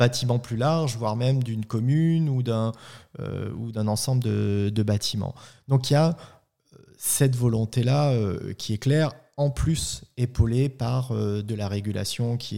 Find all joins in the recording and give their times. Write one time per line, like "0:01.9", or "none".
none